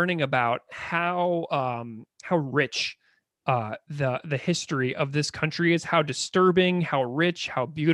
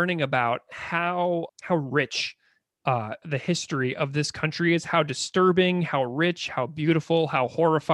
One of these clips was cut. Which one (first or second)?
second